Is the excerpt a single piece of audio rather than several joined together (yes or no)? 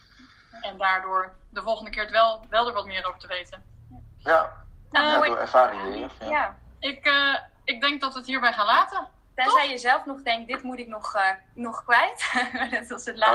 no